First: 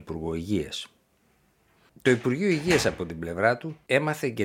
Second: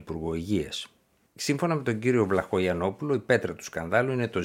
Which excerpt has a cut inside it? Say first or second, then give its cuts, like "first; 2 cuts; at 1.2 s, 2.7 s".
second; 1 cut; at 1.3 s